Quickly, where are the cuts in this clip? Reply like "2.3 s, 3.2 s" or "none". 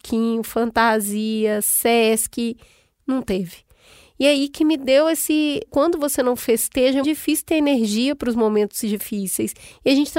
5.7 s, 7.0 s